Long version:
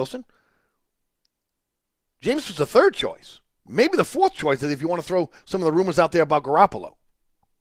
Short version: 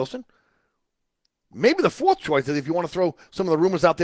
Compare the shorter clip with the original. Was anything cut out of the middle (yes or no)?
yes